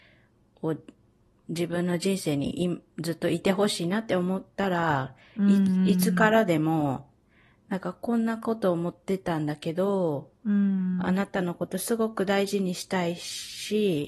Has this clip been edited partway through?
no; 0 cuts

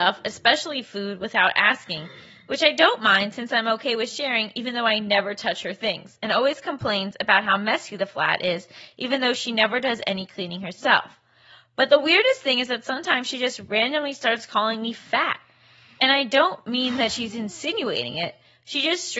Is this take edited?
no; 0 cuts

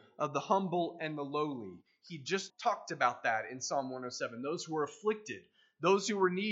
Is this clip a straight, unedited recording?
no; 1 cut; at 2.5 s

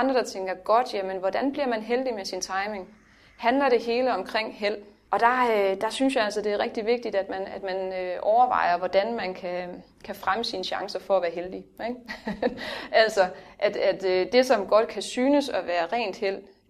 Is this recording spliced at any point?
no; 0 cuts

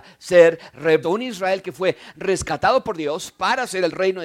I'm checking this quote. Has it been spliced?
yes; 1 cut; at 1.0 s

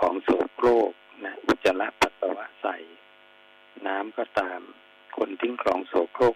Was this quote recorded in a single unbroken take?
yes; 0 cuts

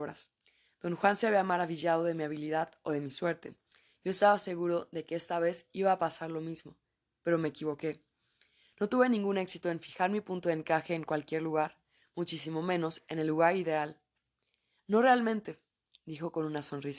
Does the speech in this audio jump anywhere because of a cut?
yes; 1 cut; at 14.8 s

